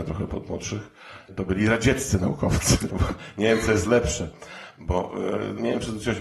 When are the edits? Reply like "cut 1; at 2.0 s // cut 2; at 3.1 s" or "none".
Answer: cut 1; at 2.9 s